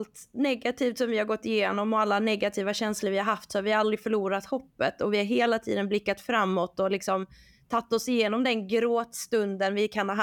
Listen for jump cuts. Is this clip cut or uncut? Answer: uncut